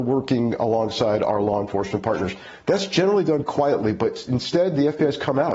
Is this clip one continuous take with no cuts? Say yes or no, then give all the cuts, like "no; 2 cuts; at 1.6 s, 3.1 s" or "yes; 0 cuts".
no; 1 cut; at 3.4 s